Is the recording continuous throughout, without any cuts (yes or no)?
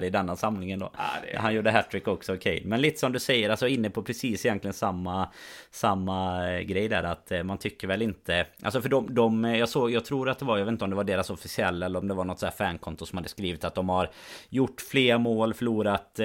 yes